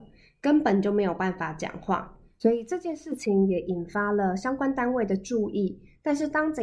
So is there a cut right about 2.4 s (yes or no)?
yes